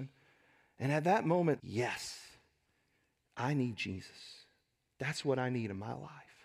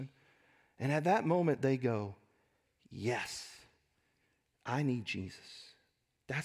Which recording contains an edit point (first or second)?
first